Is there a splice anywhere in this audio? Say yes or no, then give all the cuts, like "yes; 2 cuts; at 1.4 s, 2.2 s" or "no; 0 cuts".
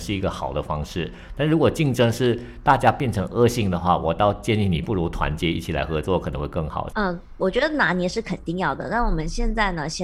yes; 1 cut; at 6.9 s